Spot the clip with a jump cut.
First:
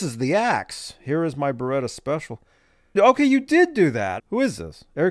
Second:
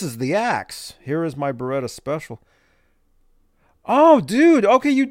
first; 2 cuts; at 3.0 s, 4.2 s

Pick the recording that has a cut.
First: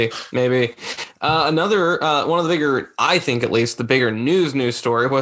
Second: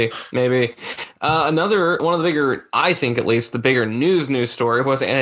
second; 1 cut; at 2.0 s

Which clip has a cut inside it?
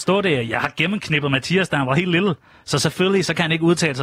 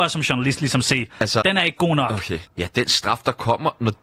second; 2 cuts; at 1.4 s, 2.4 s

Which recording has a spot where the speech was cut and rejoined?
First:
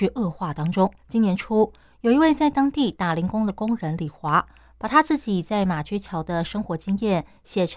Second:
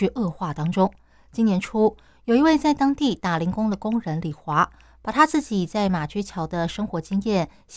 first; 1 cut; at 1.0 s

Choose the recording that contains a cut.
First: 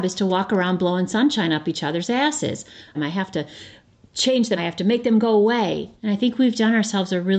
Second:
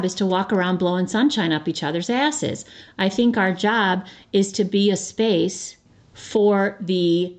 first; 3 cuts; at 2.9 s, 4.6 s, 6.0 s

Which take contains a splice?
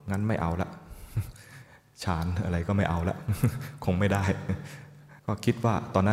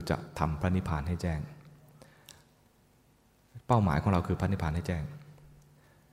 first; 1 cut; at 5.2 s

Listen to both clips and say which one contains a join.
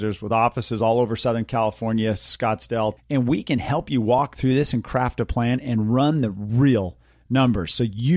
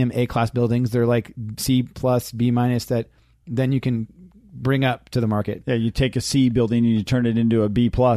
first; 1 cut; at 3.0 s

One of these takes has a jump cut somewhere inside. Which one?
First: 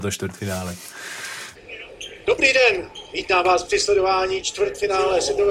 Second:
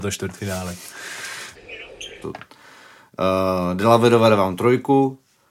second; 1 cut; at 2.2 s

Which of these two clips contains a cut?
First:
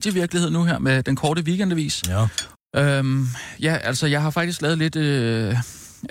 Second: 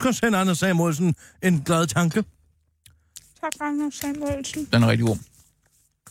first; 1 cut; at 2.5 s

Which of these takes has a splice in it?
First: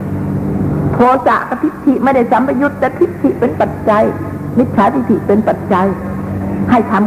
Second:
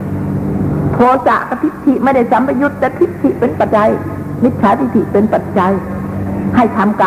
second; 1 cut; at 3.7 s

